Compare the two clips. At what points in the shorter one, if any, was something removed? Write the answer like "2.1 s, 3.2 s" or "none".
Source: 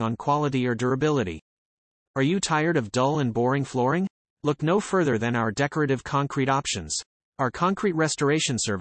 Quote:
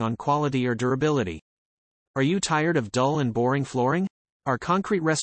4.3 s